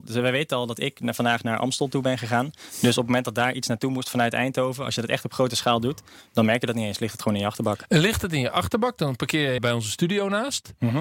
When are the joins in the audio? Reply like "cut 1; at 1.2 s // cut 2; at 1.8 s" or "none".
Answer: cut 1; at 9.6 s